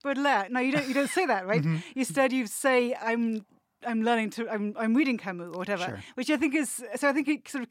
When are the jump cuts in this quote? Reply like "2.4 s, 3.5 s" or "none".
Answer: none